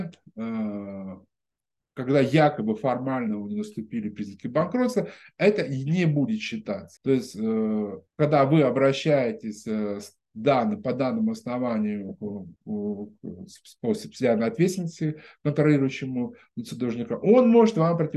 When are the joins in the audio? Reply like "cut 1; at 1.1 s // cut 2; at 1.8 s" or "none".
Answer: cut 1; at 7.0 s // cut 2; at 8.1 s // cut 3; at 12.6 s